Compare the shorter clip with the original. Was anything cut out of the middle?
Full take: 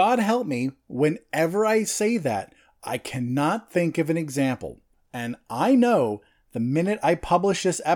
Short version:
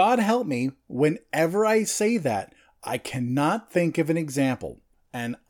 no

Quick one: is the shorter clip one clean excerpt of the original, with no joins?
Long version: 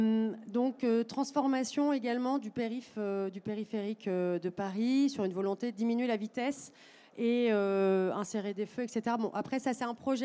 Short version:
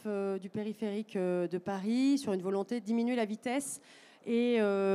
yes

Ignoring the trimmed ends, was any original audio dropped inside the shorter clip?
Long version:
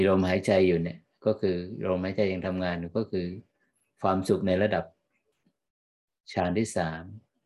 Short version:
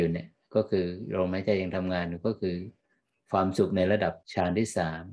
yes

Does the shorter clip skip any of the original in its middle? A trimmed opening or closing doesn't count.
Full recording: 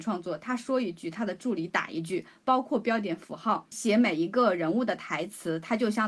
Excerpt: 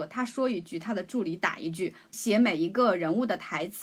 yes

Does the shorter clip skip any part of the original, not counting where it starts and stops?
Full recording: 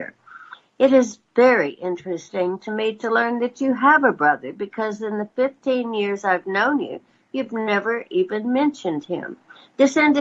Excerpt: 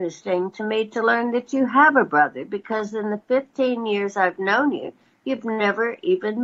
no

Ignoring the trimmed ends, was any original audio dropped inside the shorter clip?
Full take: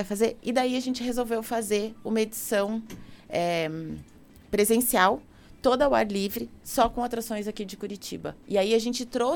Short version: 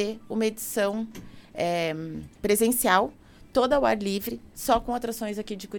yes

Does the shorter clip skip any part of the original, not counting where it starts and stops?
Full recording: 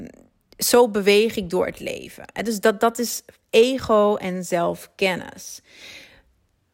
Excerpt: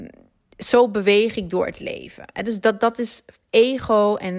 no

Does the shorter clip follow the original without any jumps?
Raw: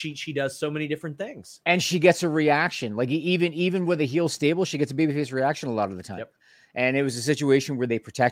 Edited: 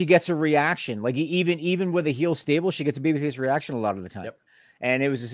yes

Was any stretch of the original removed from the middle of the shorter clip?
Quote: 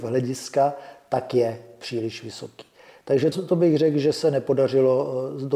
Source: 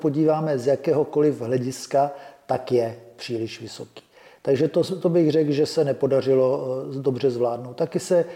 yes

